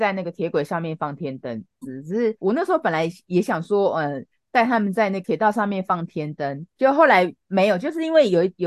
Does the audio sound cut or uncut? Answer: cut